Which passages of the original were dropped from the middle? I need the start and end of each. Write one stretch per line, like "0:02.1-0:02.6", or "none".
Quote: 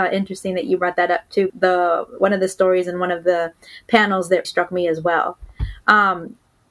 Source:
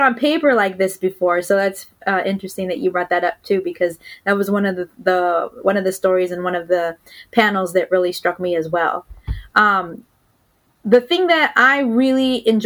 0:03.6-0:04.9
0:07.9-0:08.1